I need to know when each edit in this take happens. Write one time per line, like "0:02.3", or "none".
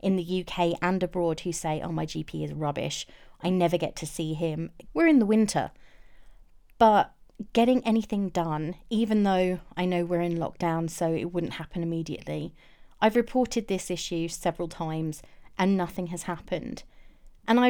0:04.9